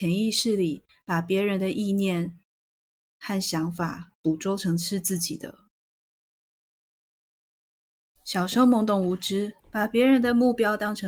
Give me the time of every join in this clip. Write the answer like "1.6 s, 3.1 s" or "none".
8.2 s, 9.6 s

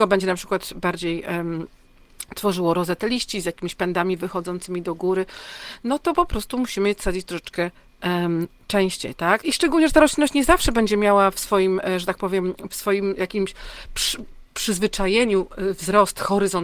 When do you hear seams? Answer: 9.4 s, 12.7 s

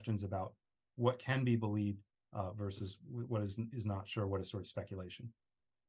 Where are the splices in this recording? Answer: none

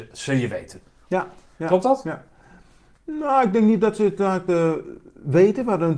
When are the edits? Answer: none

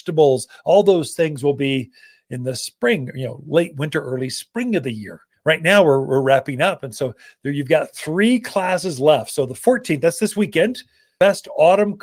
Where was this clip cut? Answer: none

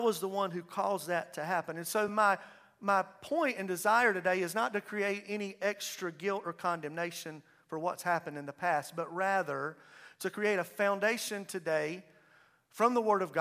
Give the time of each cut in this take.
none

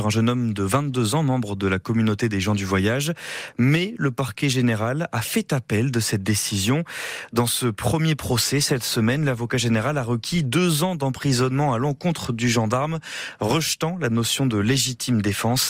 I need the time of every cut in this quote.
none

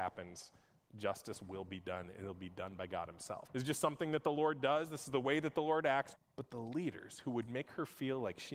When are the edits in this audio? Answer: 3.5 s, 6.2 s

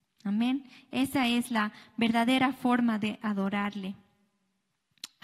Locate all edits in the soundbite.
none

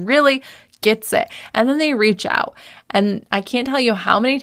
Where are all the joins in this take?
none

